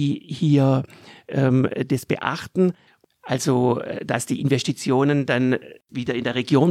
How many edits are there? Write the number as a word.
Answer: one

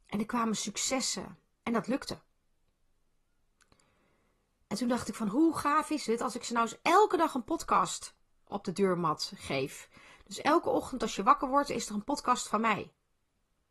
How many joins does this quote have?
one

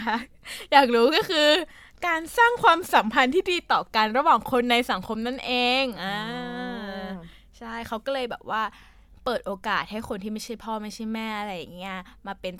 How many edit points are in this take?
zero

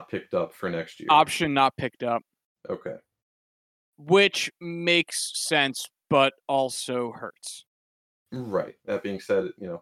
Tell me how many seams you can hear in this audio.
one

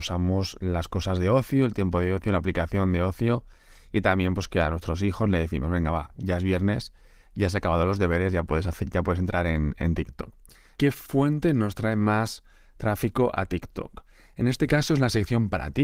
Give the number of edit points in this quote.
one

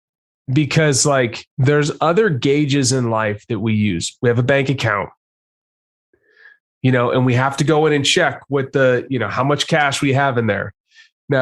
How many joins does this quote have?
one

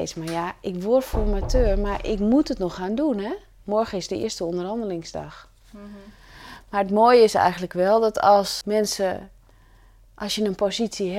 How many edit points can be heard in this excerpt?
one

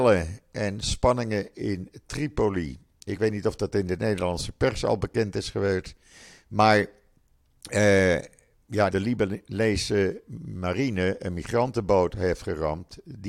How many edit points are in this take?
one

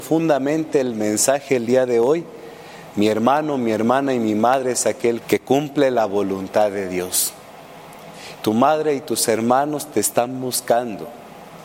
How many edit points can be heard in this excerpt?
two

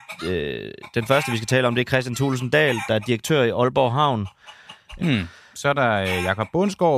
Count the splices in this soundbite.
one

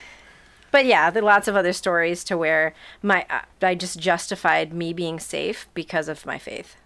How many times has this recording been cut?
one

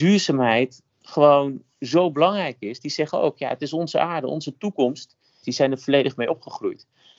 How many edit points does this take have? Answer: one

